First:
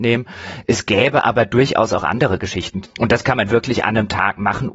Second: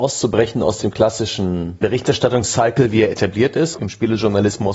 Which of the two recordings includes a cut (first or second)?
first